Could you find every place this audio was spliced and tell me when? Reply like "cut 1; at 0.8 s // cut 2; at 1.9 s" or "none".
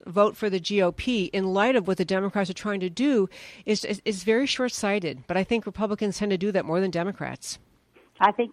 cut 1; at 3.8 s